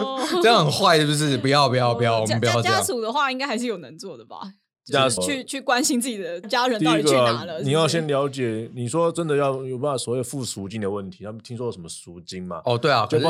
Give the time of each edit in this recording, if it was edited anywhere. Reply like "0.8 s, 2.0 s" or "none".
5.2 s, 6.4 s